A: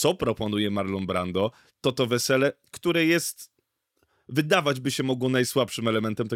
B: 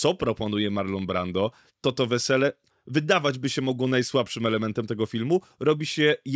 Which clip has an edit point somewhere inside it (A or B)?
B